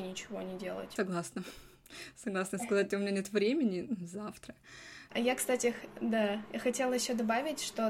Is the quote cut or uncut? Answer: cut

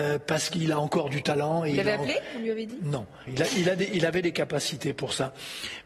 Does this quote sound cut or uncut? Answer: cut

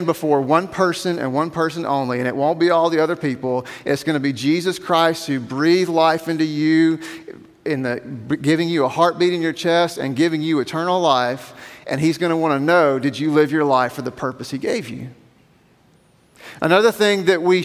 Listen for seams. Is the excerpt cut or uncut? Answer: uncut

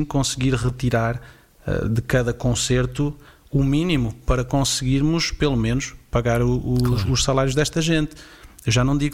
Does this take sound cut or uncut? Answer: uncut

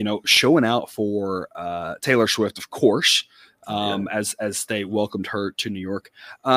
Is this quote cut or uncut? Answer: uncut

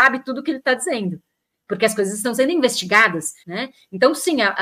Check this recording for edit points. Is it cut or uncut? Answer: cut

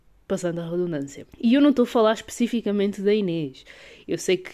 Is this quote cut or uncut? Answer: cut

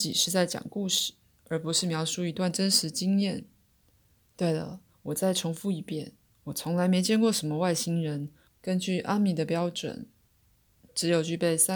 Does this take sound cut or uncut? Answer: cut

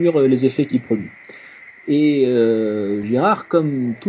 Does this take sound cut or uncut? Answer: cut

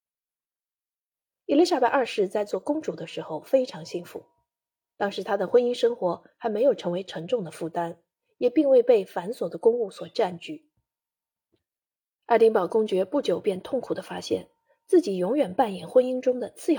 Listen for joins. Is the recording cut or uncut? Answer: uncut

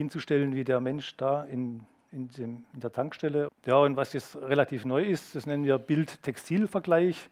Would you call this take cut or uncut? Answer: cut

